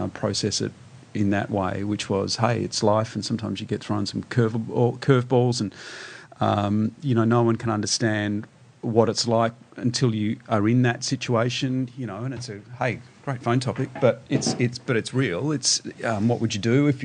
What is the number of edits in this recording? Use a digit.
0